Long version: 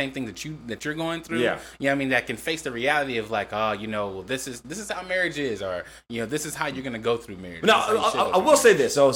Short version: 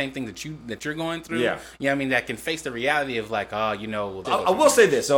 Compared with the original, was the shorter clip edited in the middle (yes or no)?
yes